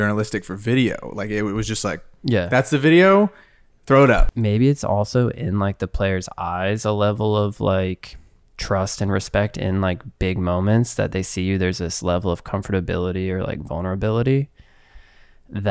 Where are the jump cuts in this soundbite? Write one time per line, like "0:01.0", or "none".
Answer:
none